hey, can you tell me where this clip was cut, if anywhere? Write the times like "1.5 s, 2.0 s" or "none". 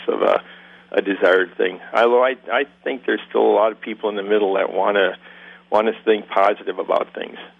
none